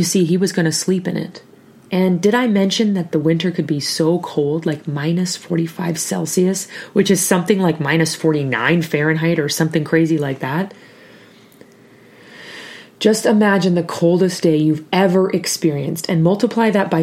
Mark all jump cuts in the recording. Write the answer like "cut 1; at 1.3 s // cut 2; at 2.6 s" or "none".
cut 1; at 1.7 s